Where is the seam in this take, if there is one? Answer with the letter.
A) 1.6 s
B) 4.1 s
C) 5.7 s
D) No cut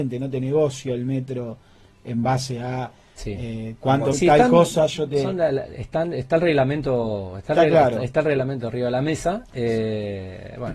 B